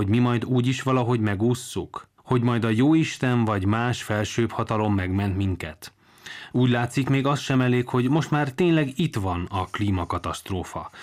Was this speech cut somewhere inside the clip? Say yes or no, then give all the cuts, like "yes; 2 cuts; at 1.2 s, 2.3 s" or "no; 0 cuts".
yes; 2 cuts; at 2.2 s, 6.5 s